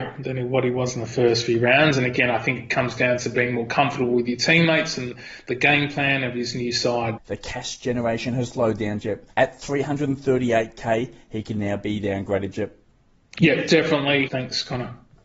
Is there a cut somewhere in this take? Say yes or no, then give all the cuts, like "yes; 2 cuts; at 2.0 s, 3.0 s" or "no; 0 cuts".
yes; 2 cuts; at 7.2 s, 14.3 s